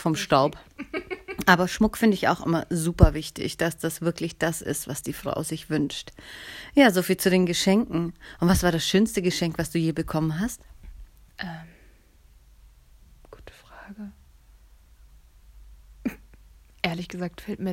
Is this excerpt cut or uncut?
uncut